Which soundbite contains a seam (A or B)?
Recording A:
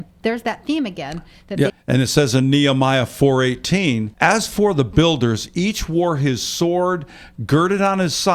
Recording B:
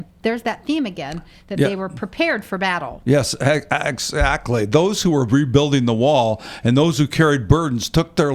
A